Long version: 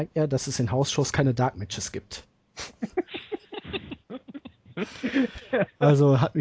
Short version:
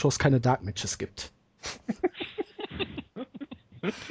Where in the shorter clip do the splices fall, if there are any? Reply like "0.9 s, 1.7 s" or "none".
none